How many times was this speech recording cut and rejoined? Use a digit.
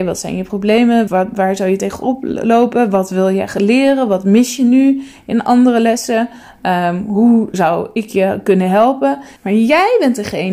2